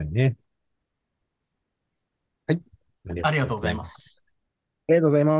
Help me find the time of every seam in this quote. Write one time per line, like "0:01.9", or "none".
none